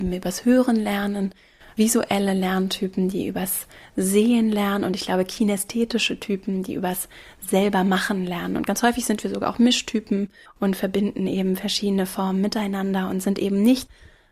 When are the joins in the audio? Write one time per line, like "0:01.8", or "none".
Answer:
none